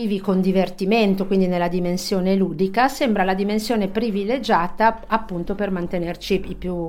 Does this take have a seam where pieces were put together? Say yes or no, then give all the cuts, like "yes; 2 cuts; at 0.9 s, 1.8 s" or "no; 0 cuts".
no; 0 cuts